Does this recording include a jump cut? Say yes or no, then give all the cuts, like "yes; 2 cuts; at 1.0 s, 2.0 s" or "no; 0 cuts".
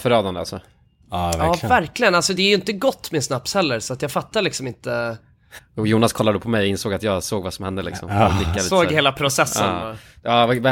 yes; 1 cut; at 5.6 s